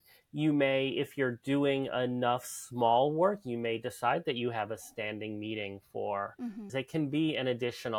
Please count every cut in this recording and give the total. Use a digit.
1